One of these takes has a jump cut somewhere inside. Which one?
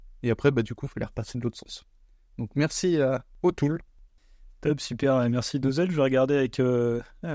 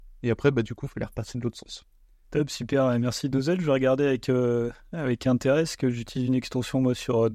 second; 1 cut; at 2.2 s

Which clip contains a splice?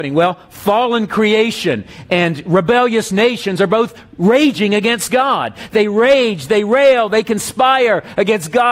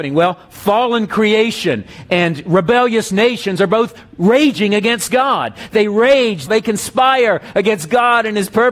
second; 1 cut; at 6.5 s

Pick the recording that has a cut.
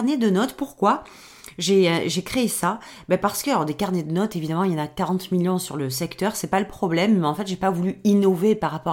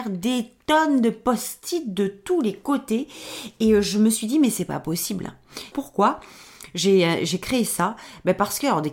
second; 1 cut; at 5.7 s

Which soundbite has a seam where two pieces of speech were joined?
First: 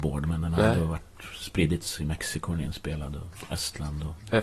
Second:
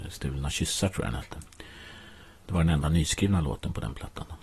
second; 1 cut; at 2.4 s

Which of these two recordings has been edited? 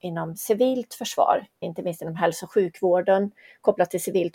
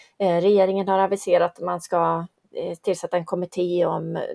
first; 1 cut; at 1.6 s

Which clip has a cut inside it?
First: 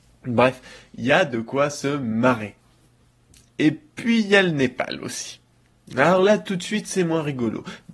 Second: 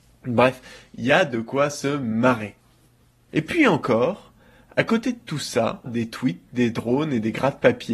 second; 2 cuts; at 3.3 s, 5.9 s

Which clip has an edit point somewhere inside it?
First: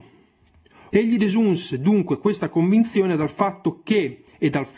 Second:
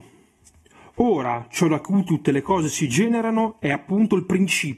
first; 1 cut; at 0.9 s

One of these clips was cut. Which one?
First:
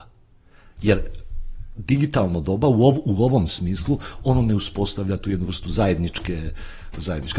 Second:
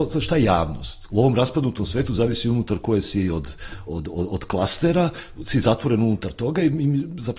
second; 2 cuts; at 1.1 s, 3.9 s

